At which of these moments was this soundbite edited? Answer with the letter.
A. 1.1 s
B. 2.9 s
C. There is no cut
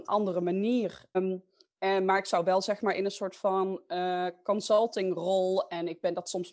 A